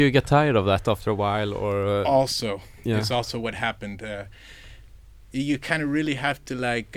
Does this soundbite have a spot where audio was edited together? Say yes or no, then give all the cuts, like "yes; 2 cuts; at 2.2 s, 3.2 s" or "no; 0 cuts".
no; 0 cuts